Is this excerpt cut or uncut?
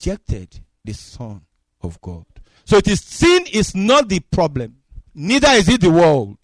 cut